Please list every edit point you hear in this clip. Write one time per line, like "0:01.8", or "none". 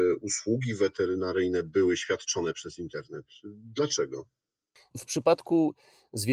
0:04.9